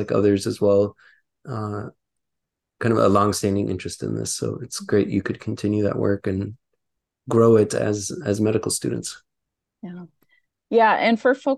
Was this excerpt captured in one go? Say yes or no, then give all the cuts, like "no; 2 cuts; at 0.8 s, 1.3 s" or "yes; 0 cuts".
yes; 0 cuts